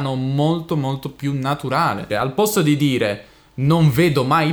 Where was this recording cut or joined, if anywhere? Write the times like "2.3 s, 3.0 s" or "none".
2.1 s